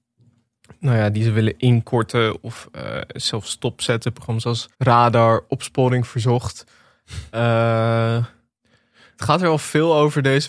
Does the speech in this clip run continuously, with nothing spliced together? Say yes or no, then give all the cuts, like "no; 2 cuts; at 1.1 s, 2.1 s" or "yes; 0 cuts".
no; 1 cut; at 4.7 s